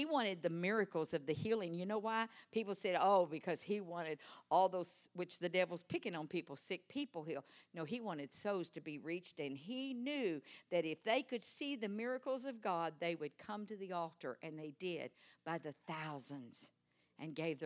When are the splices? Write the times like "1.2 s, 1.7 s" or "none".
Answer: none